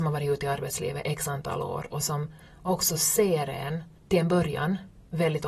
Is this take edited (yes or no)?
yes